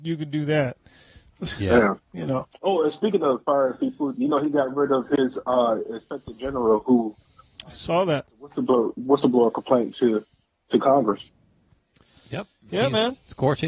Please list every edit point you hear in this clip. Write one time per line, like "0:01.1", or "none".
none